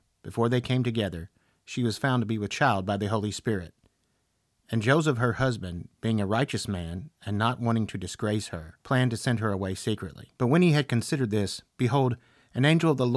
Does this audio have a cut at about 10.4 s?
yes; 2 cuts; at 8.8 s, 10.4 s

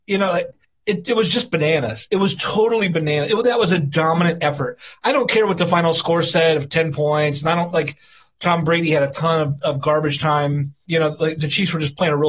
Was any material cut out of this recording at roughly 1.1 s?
no; 0 cuts

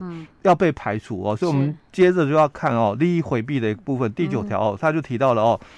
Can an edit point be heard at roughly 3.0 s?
no; 0 cuts

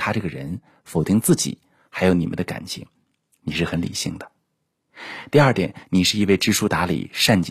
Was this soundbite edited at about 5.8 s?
yes; 1 cut; at 5.8 s

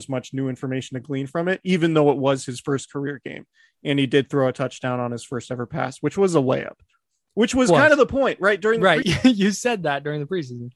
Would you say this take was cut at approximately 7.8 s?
no; 1 cut; at 9.0 s

